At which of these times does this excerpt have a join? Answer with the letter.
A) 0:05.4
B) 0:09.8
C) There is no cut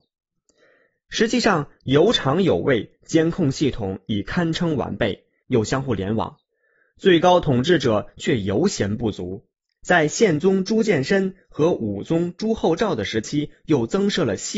A